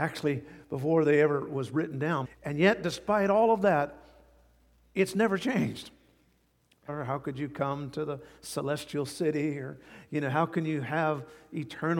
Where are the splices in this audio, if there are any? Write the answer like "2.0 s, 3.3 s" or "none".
2.2 s, 6.9 s